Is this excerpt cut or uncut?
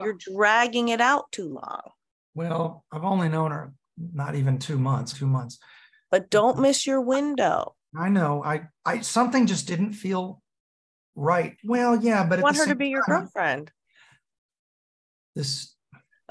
cut